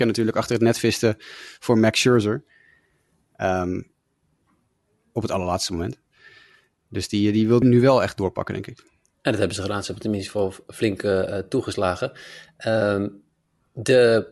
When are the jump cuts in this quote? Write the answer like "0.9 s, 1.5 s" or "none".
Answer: 7.6 s